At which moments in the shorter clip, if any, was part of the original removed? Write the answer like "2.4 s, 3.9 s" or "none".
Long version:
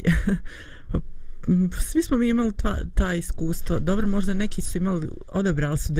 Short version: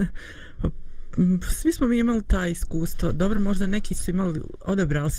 2.2 s

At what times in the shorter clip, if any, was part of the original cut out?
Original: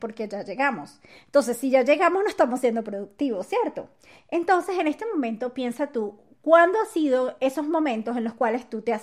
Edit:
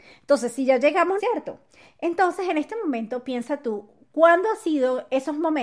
1.2 s

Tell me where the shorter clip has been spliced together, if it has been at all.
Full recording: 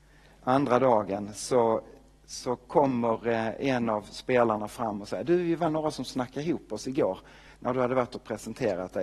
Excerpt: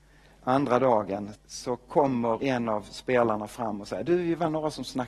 1.3 s, 2.4 s

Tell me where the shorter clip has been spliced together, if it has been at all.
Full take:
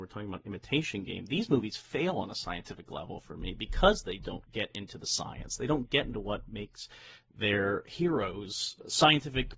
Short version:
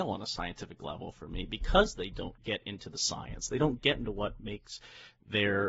none

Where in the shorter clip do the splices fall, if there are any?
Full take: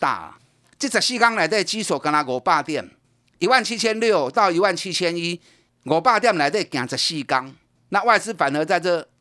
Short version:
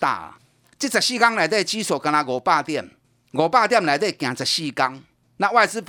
3.3 s

